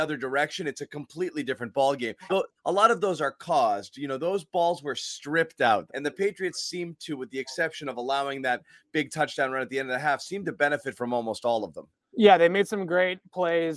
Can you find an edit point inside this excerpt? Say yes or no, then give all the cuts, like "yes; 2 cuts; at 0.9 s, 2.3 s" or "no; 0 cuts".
yes; 2 cuts; at 2.3 s, 5.9 s